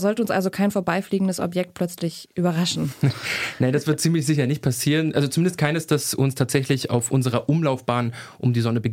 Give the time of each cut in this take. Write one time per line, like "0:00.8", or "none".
none